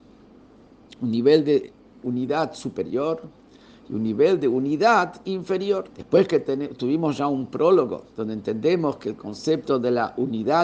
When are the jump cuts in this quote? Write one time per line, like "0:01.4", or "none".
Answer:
0:05.9
0:08.1